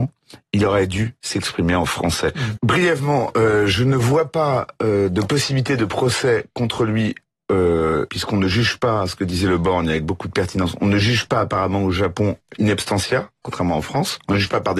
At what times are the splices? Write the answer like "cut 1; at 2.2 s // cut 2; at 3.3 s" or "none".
cut 1; at 2.6 s // cut 2; at 8.1 s